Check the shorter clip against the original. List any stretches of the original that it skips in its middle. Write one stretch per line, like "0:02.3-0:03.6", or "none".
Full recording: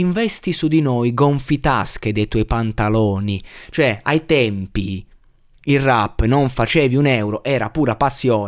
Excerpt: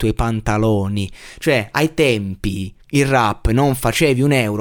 0:05.1-0:05.6